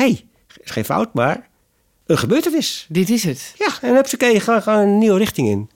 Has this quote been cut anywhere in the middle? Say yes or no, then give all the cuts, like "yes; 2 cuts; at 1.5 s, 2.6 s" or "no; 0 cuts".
no; 0 cuts